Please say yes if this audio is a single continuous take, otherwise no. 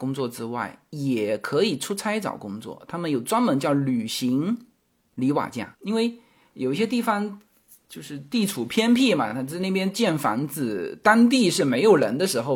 yes